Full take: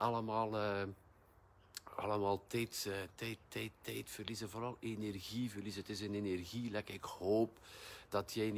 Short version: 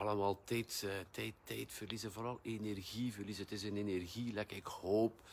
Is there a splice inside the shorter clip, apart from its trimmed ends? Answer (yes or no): yes